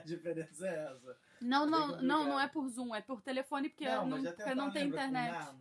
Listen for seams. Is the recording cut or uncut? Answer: cut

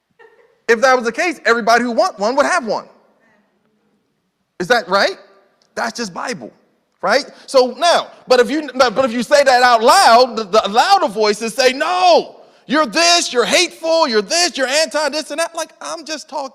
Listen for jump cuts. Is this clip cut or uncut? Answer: uncut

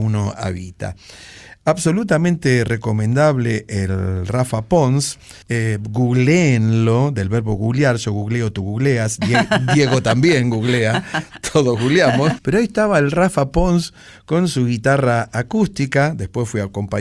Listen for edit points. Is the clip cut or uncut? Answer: cut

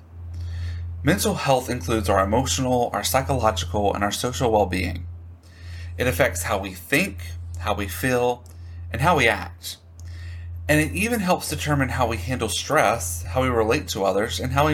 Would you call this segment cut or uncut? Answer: uncut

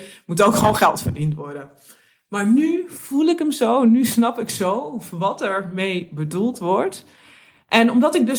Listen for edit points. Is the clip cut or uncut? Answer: uncut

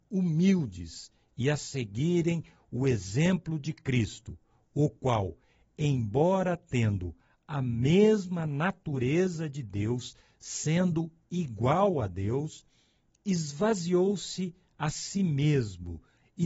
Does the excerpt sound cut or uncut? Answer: uncut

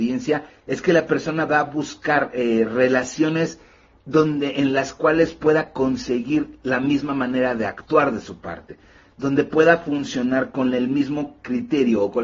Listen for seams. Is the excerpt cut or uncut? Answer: uncut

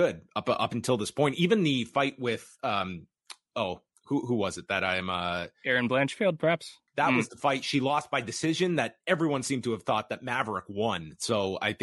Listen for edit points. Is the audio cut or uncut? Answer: cut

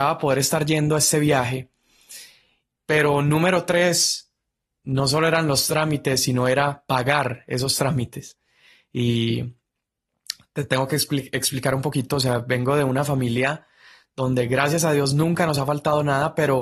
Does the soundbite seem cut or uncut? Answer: cut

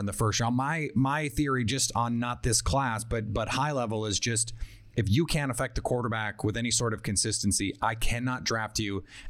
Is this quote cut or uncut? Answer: uncut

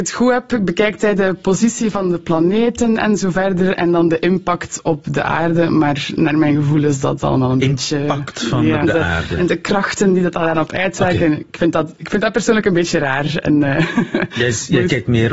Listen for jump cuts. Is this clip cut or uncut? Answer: cut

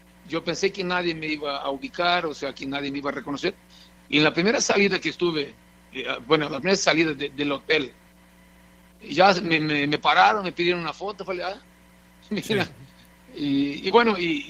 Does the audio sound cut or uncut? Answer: cut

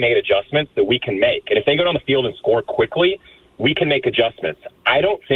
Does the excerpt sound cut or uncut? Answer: uncut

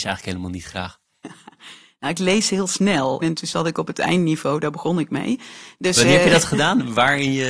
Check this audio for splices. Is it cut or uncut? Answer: cut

